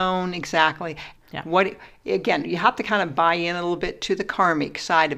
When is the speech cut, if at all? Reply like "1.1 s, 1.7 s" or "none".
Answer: 1.2 s